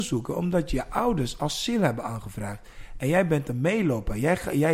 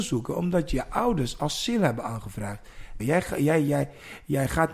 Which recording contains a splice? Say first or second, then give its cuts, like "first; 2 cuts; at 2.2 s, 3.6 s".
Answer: second; 1 cut; at 3.0 s